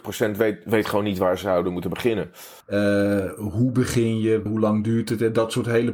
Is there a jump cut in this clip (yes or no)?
yes